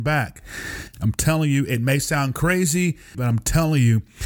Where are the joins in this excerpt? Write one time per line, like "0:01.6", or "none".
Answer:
0:00.9
0:03.1